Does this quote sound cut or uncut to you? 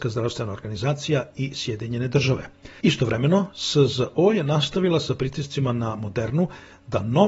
cut